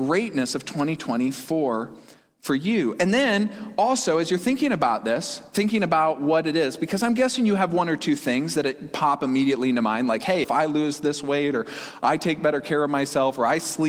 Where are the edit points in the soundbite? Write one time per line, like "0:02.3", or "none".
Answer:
0:10.4